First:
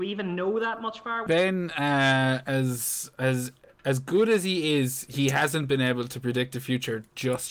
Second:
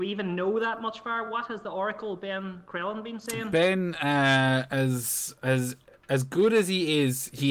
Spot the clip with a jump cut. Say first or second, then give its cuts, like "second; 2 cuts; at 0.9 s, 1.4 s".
first; 1 cut; at 1.3 s